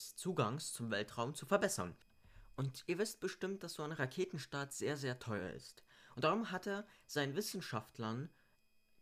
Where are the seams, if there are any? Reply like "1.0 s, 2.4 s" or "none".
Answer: 6.1 s